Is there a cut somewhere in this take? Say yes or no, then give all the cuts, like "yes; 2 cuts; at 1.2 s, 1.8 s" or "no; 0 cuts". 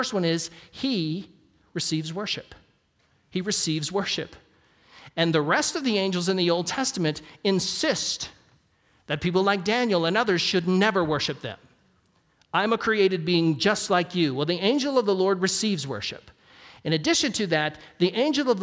no; 0 cuts